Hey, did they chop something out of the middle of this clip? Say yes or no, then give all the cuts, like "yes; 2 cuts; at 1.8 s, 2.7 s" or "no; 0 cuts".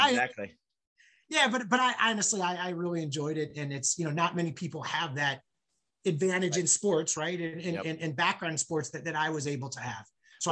no; 0 cuts